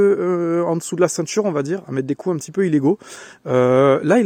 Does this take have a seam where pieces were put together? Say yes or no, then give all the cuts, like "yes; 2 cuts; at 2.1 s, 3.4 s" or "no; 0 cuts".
no; 0 cuts